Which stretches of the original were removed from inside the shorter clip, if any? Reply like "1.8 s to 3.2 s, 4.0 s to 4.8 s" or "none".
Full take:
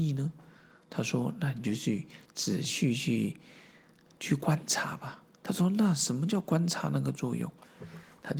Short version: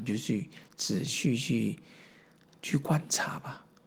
none